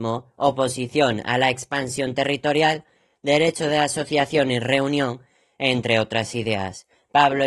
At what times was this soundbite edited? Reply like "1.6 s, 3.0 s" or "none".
none